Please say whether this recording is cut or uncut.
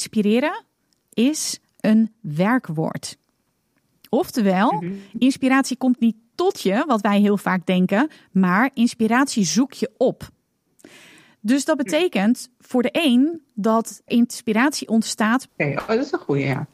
cut